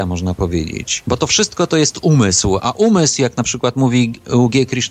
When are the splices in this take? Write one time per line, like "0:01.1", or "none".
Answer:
none